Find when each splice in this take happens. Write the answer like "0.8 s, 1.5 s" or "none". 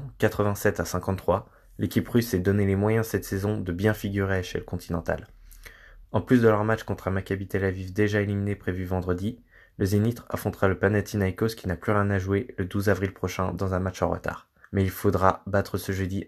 6.0 s, 14.6 s